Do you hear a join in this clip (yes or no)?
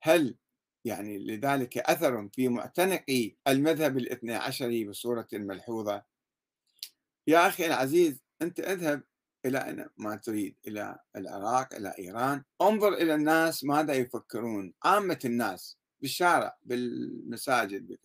yes